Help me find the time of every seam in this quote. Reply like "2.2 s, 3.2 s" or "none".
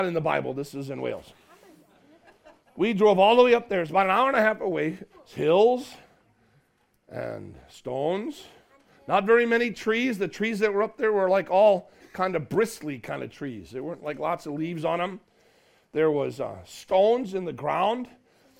5.1 s